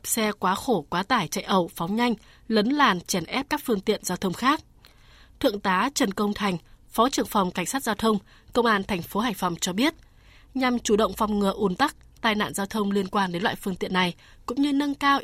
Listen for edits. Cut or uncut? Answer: uncut